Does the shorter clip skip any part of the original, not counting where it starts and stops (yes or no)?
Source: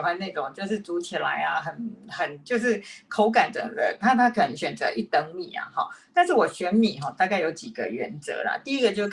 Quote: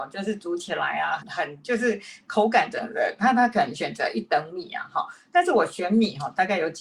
yes